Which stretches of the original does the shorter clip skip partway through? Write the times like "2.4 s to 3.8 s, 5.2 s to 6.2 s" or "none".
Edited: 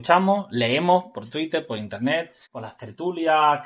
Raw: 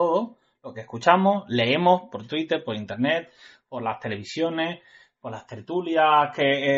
3.4 s to 5.1 s